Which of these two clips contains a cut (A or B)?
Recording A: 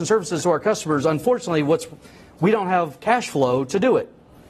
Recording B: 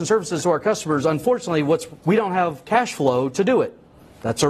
B